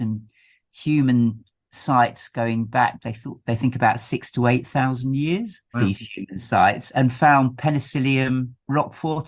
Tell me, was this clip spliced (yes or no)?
yes